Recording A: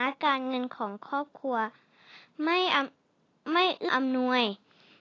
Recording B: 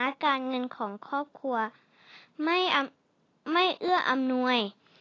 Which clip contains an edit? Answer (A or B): A